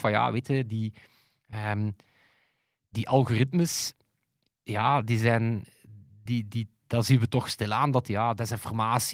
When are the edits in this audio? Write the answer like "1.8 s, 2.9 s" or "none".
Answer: none